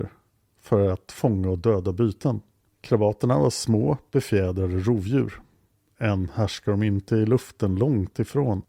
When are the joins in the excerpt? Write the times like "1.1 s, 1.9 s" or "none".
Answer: 2.7 s

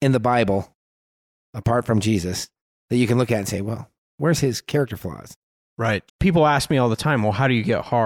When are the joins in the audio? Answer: 6.1 s

